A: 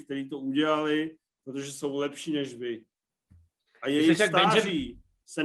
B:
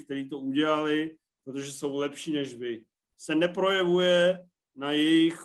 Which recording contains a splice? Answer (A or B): B